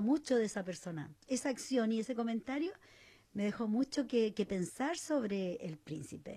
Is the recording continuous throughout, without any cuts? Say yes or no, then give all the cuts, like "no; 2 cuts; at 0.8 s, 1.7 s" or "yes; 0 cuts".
yes; 0 cuts